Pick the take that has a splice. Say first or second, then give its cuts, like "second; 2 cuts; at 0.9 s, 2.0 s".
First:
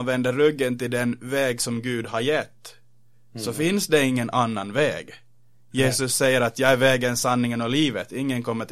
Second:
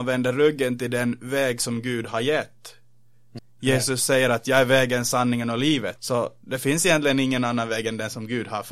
second; 2 cuts; at 3.4 s, 6.0 s